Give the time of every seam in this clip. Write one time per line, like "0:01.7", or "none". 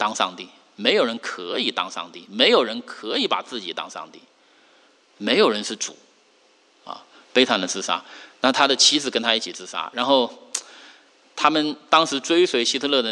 none